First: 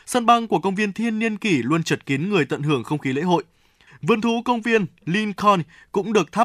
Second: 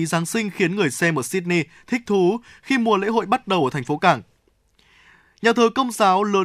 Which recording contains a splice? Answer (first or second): first